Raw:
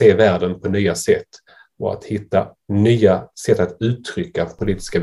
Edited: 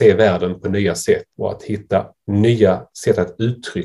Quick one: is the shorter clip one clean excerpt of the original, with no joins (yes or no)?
no